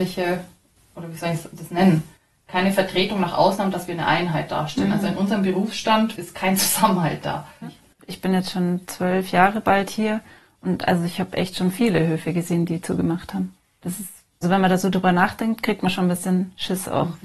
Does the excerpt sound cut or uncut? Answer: cut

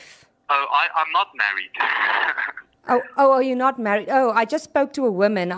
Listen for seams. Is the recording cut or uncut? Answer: uncut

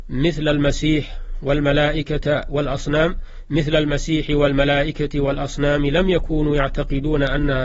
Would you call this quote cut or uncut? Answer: uncut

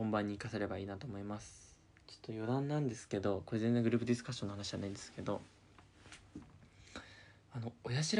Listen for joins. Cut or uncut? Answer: cut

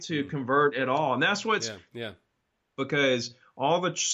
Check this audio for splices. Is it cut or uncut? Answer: cut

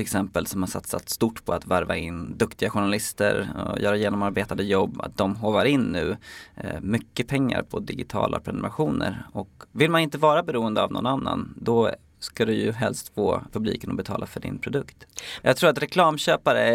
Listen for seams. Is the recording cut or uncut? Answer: cut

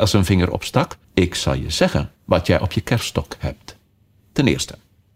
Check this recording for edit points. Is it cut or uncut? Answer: cut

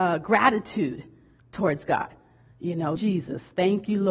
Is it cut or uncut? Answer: cut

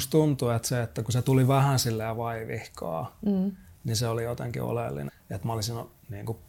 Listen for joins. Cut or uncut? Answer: cut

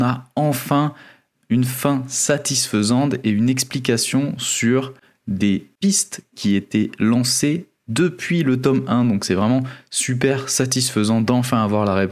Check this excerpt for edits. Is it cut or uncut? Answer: uncut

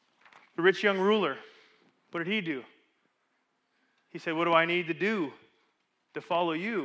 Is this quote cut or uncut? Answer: uncut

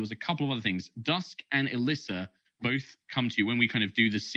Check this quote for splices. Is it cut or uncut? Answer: uncut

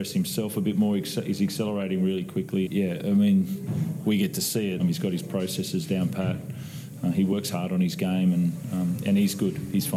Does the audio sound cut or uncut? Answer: cut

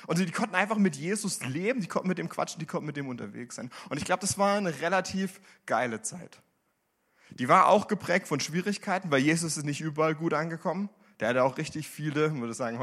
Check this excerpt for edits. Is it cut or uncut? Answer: uncut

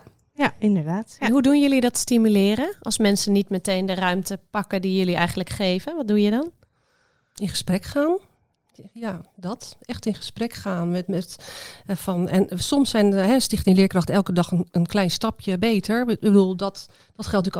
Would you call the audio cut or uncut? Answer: uncut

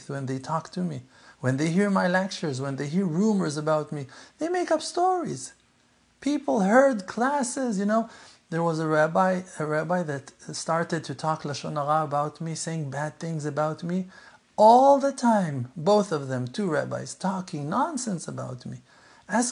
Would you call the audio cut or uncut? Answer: uncut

